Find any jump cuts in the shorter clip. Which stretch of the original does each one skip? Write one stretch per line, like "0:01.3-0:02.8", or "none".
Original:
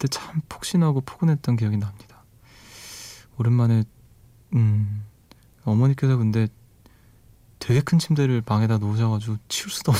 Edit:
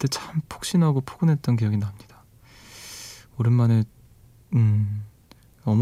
none